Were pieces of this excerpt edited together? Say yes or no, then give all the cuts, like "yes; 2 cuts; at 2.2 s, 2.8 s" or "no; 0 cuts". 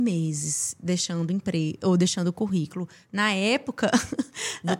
no; 0 cuts